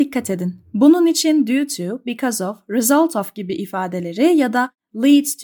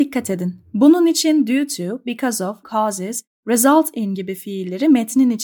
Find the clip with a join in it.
second; 1 cut; at 2.6 s

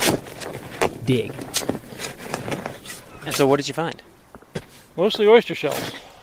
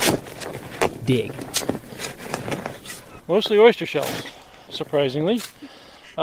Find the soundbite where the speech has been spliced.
second; 2 cuts; at 3.2 s, 4.7 s

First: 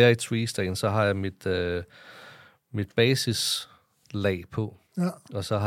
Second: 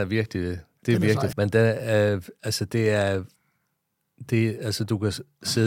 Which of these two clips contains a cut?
second; 1 cut; at 1.3 s

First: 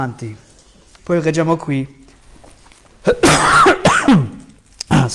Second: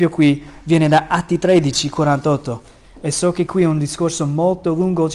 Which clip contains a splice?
first; 1 cut; at 1.0 s

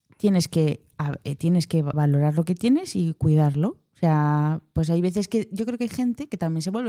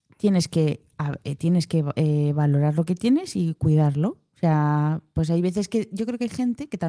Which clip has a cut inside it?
first; 1 cut; at 1.9 s

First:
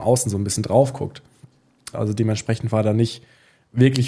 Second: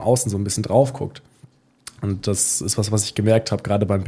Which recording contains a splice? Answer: first; 1 cut; at 1.9 s

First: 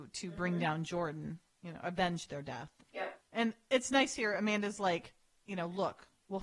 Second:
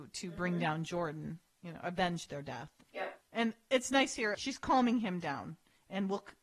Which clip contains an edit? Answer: second; 1 cut; at 4.3 s

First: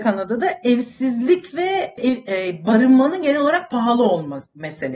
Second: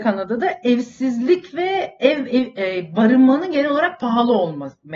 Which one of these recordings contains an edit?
first; 1 cut; at 2.0 s

